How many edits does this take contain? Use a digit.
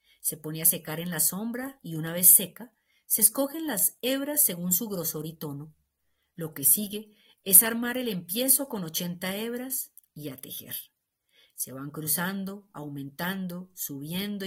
0